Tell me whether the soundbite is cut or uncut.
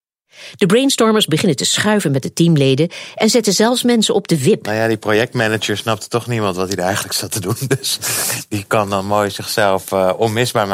uncut